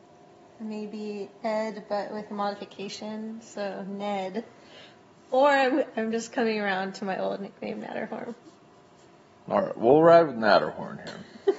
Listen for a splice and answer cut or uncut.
uncut